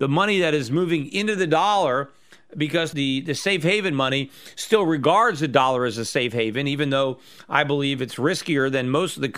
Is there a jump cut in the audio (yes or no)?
no